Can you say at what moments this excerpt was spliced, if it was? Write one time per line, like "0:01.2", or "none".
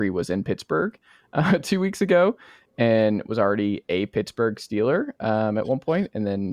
none